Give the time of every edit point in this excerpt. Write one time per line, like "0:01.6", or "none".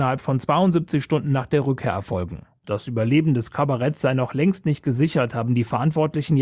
0:02.6